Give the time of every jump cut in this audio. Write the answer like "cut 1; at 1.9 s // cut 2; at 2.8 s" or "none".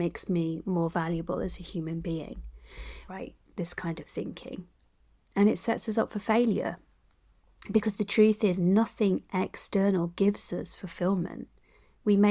cut 1; at 3.1 s